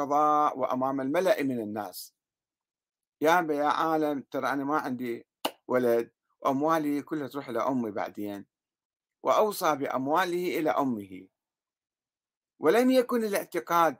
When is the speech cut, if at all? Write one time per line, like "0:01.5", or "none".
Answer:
none